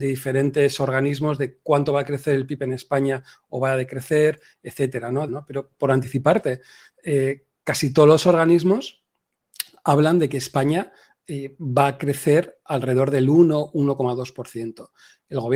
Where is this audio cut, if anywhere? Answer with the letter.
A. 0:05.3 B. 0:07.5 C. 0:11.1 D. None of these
A